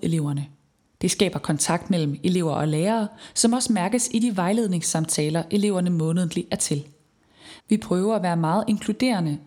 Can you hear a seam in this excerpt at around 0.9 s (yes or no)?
no